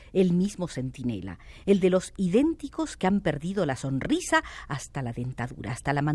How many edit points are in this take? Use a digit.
0